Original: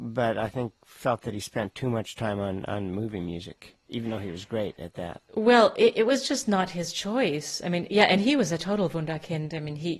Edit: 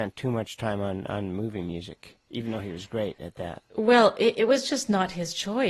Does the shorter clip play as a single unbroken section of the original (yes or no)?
yes